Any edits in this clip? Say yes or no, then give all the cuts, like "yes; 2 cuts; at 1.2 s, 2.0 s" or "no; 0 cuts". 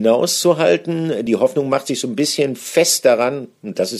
no; 0 cuts